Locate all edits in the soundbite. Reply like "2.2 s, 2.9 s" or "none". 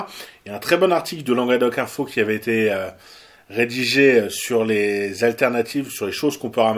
none